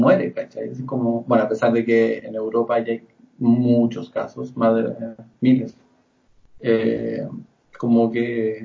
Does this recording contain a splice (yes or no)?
yes